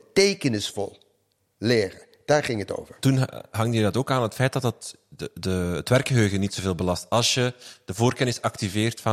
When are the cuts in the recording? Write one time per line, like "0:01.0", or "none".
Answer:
none